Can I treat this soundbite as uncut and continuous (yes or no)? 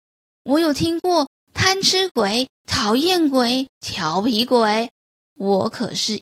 yes